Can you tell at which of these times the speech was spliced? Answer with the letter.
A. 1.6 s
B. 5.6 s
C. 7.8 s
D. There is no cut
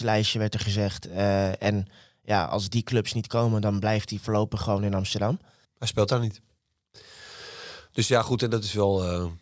B